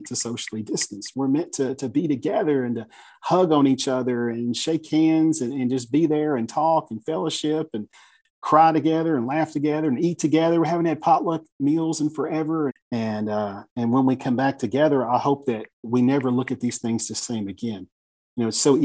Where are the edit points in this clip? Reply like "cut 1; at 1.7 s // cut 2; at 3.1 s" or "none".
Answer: cut 1; at 12.7 s